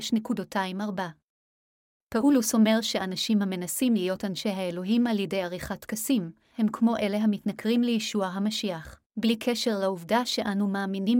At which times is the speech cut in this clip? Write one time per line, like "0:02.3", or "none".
0:06.5
0:09.1